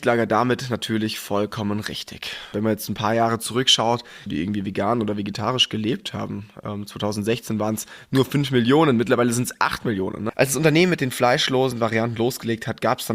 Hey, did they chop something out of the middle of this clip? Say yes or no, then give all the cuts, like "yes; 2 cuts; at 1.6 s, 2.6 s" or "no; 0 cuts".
yes; 2 cuts; at 4.3 s, 10.3 s